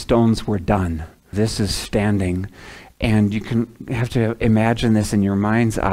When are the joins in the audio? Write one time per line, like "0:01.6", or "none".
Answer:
0:01.3